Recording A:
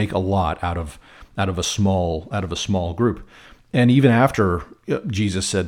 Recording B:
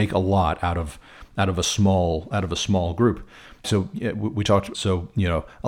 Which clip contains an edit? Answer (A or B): B